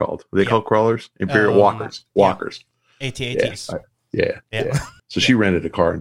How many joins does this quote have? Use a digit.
1